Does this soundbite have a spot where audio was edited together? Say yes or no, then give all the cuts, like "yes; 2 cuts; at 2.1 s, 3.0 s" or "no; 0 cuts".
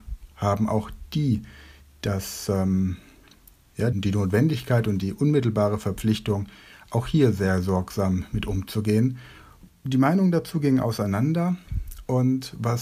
yes; 2 cuts; at 3.9 s, 9.7 s